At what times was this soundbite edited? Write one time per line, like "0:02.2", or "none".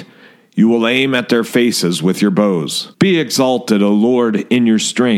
0:02.9